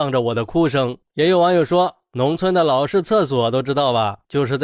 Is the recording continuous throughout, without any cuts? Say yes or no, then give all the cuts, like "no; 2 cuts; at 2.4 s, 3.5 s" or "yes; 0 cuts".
yes; 0 cuts